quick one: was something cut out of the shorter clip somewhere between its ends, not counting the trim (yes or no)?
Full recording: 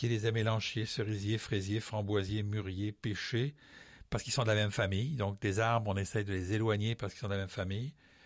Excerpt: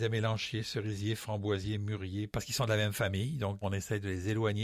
yes